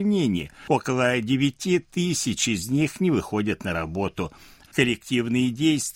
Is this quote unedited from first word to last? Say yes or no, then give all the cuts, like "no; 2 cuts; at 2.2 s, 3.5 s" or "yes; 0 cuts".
no; 1 cut; at 4.6 s